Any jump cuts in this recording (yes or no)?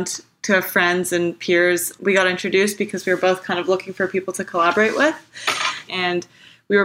yes